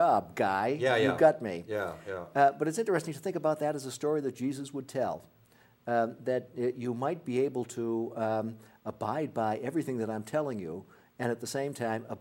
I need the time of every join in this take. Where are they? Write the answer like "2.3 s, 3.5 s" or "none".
none